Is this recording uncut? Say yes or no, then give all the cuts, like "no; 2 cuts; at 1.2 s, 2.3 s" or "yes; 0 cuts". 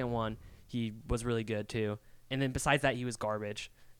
yes; 0 cuts